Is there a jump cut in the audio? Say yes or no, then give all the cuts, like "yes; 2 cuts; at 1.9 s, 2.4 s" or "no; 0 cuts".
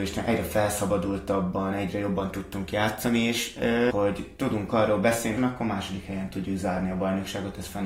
yes; 2 cuts; at 3.9 s, 5.4 s